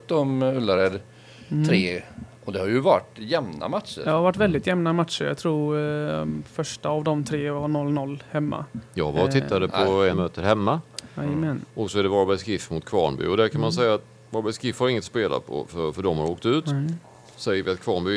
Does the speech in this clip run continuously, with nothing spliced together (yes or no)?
no